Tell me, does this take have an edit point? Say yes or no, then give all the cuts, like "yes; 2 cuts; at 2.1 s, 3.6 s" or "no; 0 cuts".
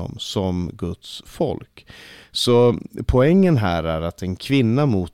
no; 0 cuts